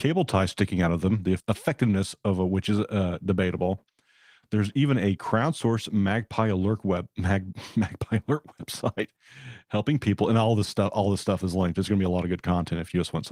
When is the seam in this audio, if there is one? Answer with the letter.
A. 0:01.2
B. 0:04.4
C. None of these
C